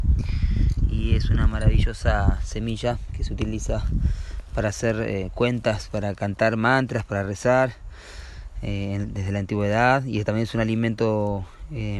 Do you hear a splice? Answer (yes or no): no